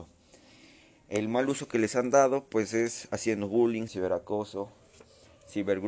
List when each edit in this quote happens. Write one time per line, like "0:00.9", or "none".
0:03.9